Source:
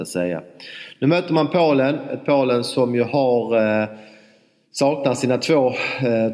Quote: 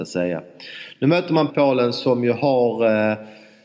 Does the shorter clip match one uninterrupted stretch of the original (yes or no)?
no